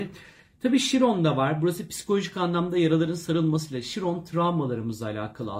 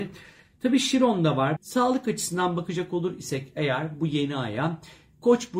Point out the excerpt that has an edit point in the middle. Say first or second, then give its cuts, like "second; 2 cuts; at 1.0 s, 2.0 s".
second; 1 cut; at 1.6 s